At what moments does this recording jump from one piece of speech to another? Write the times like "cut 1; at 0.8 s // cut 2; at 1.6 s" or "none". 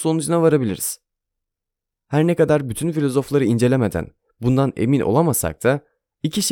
none